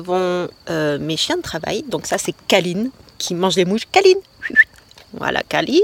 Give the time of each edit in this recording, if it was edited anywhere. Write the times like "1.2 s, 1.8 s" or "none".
none